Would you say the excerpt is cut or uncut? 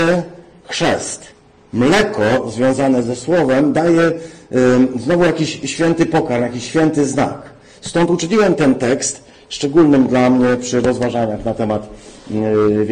uncut